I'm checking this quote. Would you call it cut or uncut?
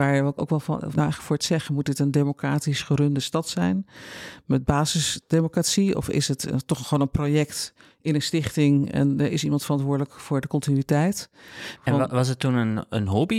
cut